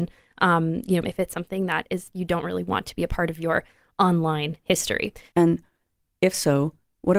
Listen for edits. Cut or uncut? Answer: cut